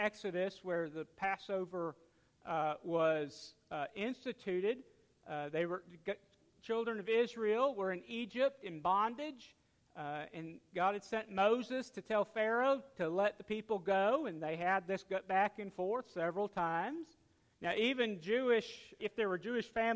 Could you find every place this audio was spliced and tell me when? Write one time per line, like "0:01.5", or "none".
0:17.5
0:19.0